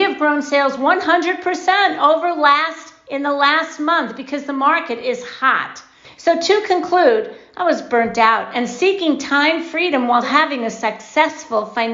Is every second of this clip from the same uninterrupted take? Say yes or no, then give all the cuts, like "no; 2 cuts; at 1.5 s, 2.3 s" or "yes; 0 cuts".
no; 2 cuts; at 6.0 s, 10.2 s